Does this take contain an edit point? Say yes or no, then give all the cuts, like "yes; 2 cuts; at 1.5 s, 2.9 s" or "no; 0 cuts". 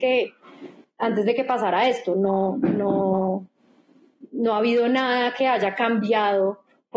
no; 0 cuts